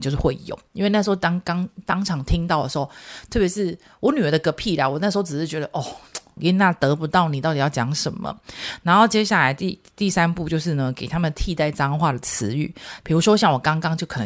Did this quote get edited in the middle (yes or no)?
yes